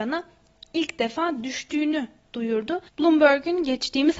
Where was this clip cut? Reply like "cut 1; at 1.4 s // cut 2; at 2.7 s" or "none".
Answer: cut 1; at 2.9 s